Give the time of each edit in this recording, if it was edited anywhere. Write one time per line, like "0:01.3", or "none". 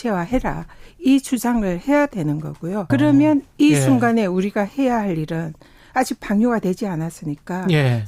0:02.9

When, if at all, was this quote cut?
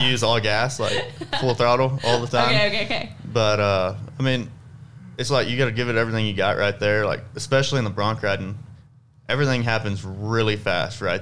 0:05.3

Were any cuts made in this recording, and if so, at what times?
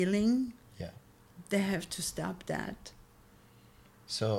none

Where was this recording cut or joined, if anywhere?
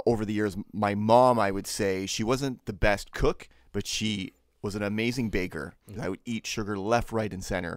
0:06.0

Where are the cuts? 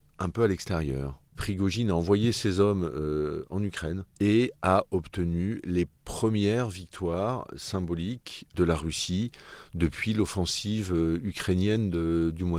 0:01.3
0:04.1

